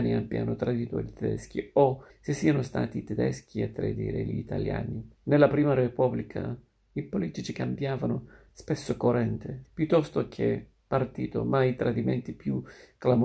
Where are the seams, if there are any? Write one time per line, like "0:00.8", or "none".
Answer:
0:02.1
0:05.1
0:09.6

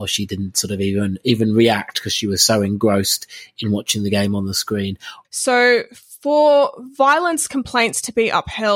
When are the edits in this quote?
0:05.2

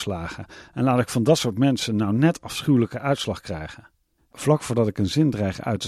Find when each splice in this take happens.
0:04.2

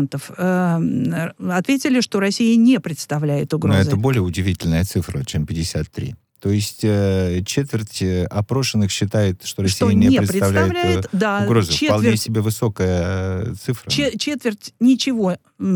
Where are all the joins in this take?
none

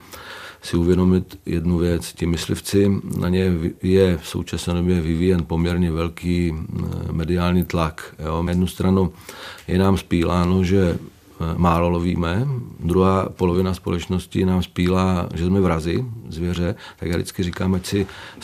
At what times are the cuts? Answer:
none

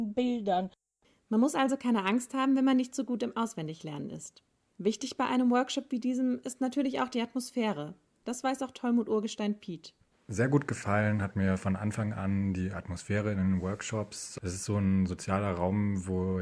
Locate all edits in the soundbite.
0:08.2

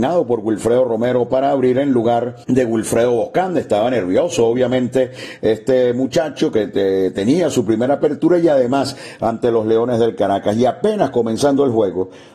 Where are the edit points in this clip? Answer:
0:02.4

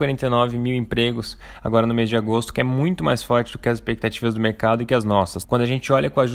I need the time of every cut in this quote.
0:05.4

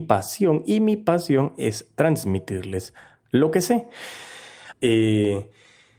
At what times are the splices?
0:04.7

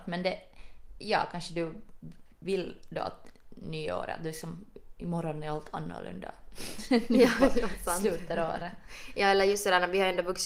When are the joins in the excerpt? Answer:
0:01.0

